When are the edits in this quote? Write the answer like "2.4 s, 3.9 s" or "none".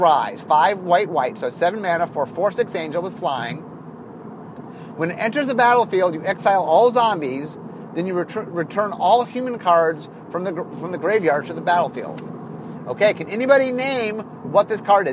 none